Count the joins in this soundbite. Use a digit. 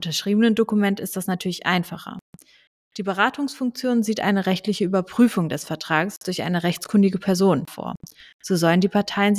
1